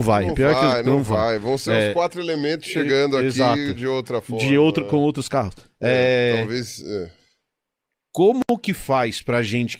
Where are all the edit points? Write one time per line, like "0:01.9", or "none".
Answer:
none